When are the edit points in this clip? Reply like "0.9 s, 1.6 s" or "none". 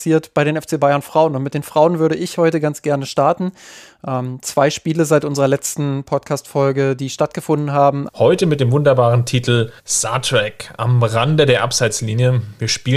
8.1 s, 9.8 s

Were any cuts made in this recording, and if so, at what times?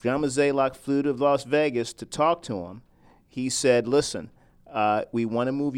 none

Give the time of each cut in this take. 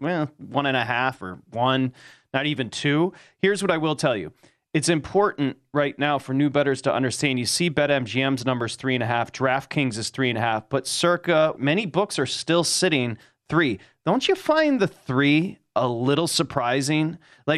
11.6 s

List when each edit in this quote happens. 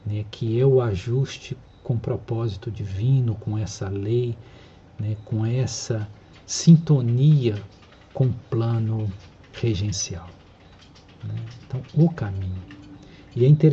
none

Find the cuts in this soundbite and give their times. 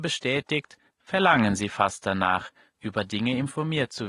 none

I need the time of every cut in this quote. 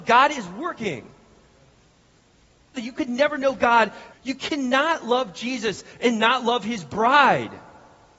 2.7 s, 4.1 s

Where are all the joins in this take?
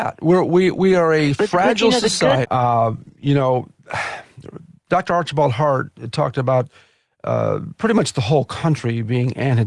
2.4 s

